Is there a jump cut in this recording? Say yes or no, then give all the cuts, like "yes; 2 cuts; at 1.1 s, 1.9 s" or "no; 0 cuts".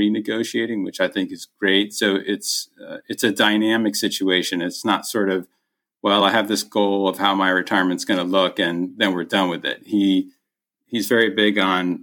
no; 0 cuts